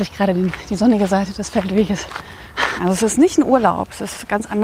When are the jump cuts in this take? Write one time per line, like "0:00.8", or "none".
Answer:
0:02.8

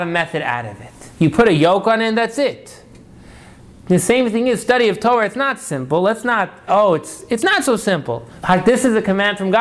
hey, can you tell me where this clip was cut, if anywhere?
0:06.7
0:08.4

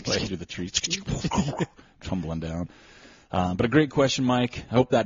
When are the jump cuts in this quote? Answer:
none

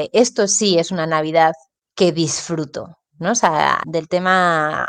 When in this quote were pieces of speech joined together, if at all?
0:03.8

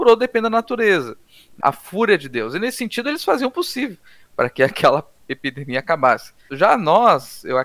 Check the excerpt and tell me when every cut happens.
0:01.6

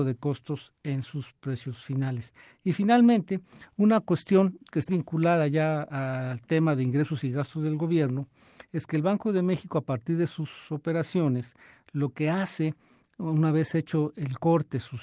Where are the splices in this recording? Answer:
0:04.9

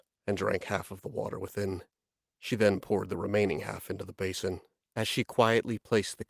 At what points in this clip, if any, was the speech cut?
0:04.8

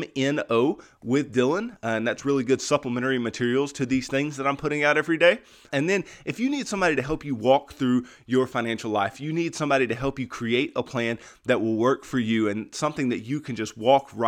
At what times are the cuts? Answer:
0:05.7

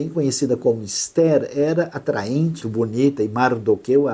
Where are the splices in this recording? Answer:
0:02.6

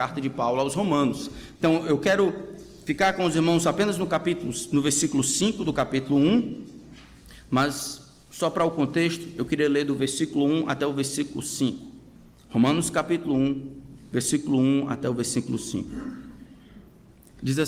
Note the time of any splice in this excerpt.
0:01.6

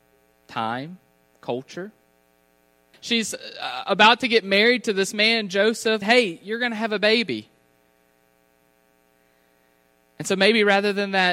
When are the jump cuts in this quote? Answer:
0:02.9
0:06.0

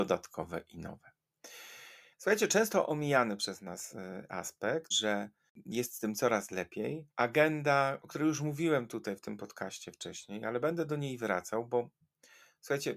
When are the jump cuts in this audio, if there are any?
0:02.1
0:04.9
0:07.1

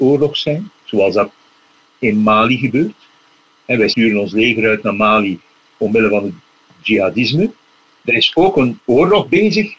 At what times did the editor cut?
0:05.7
0:08.0

